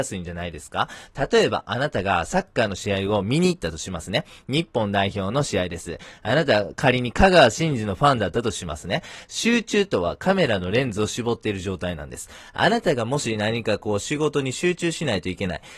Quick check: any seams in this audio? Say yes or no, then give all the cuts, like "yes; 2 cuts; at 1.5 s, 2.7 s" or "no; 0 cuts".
yes; 1 cut; at 9.2 s